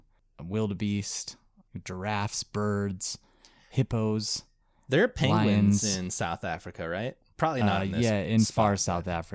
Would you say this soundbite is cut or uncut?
uncut